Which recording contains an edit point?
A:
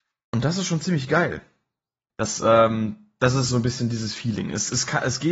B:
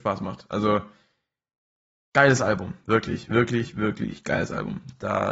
A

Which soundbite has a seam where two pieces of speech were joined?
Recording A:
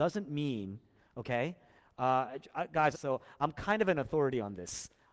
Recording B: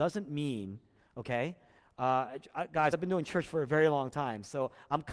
A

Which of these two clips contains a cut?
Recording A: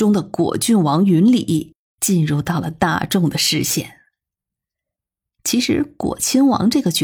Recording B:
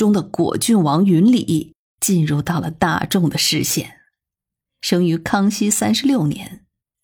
B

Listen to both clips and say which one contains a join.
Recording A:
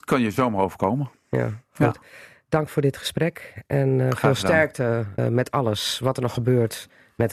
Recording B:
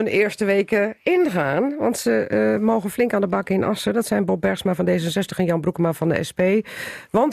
A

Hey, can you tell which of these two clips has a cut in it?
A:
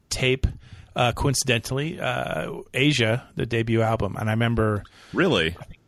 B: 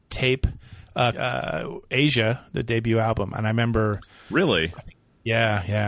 B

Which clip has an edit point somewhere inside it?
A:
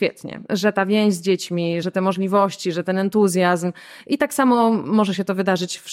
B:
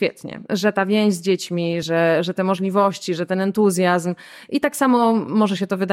A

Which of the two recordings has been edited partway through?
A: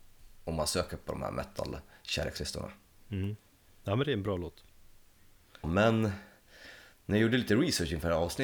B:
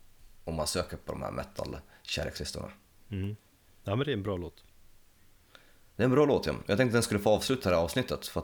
A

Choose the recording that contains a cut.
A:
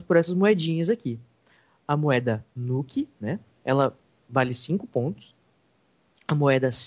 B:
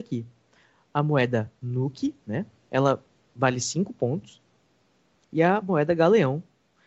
B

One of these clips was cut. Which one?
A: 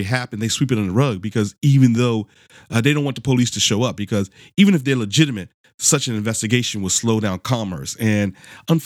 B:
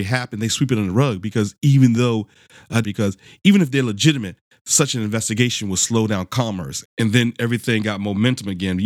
B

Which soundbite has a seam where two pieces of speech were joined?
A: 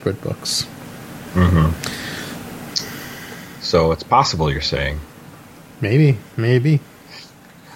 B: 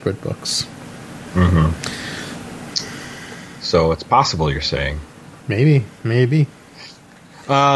B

